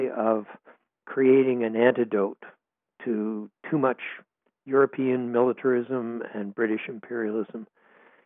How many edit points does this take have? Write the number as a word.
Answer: zero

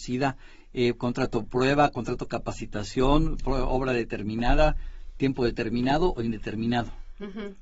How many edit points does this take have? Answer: one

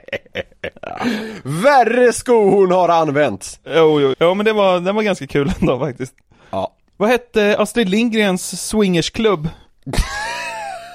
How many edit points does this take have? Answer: one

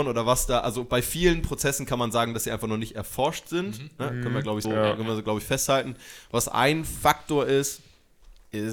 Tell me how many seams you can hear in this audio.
one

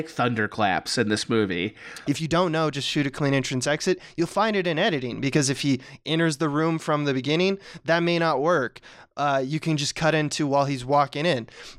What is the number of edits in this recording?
one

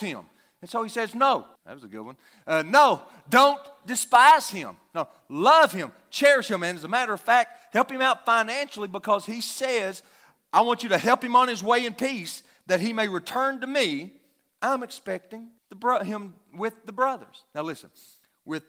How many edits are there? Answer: two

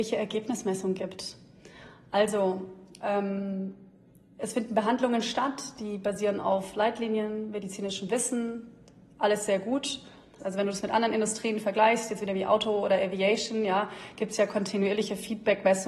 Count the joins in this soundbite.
one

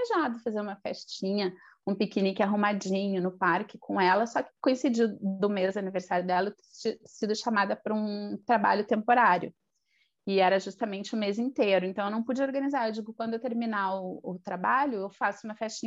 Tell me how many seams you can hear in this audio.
zero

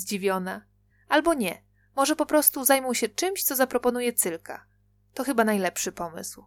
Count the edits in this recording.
zero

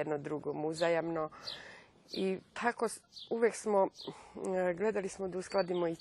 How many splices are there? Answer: one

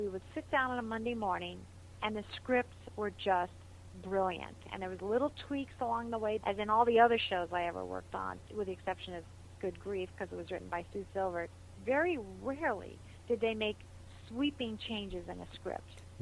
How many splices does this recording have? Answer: two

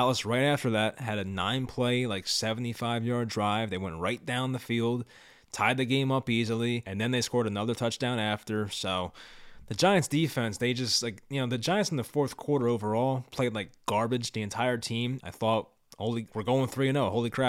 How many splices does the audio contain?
two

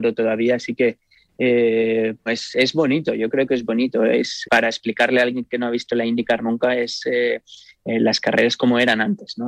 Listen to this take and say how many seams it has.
two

